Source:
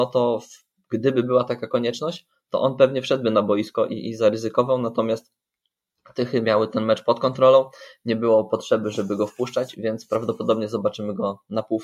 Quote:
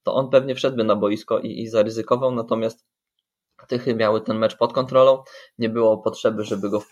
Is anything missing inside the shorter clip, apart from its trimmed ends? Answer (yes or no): no